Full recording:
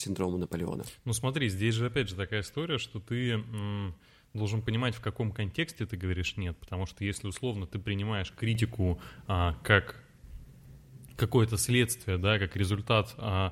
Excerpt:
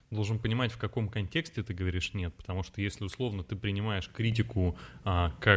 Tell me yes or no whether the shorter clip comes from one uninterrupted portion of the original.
yes